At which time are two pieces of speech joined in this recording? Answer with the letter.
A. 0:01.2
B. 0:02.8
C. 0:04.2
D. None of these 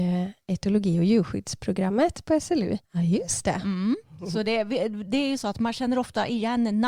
B